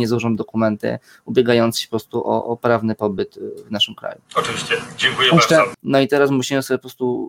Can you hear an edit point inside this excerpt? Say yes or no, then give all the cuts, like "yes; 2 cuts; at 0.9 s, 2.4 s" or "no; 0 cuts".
yes; 2 cuts; at 4.3 s, 5.7 s